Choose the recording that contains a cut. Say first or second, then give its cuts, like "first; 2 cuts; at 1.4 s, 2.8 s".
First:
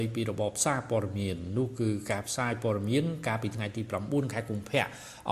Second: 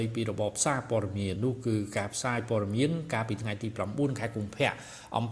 second; 1 cut; at 1.4 s